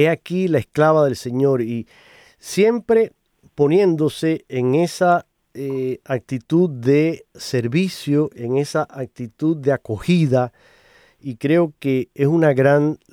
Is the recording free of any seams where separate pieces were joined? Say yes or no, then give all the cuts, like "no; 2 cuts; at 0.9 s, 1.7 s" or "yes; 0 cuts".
yes; 0 cuts